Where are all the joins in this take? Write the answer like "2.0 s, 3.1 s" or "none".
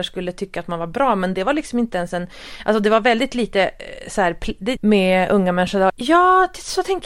2.6 s, 4.8 s, 5.9 s